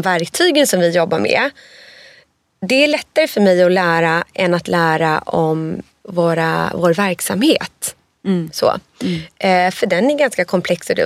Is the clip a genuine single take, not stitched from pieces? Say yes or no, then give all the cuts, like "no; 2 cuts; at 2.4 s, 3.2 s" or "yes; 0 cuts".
yes; 0 cuts